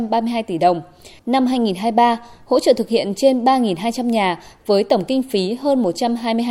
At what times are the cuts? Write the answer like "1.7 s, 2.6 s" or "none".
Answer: 1.2 s